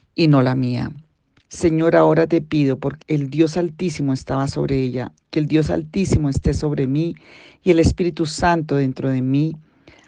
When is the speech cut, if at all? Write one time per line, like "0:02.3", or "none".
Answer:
0:01.4
0:03.0